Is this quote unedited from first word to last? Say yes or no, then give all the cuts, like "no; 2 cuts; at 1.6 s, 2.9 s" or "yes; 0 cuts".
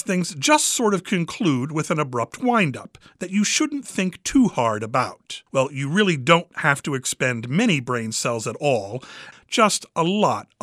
no; 2 cuts; at 5.5 s, 9.3 s